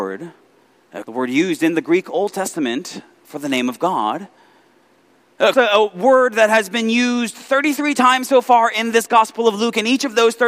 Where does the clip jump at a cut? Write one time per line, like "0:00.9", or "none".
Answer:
0:01.0
0:05.5